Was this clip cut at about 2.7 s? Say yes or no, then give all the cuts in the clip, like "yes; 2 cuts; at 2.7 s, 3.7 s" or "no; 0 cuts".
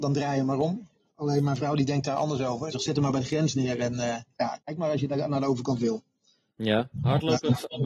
yes; 1 cut; at 2.7 s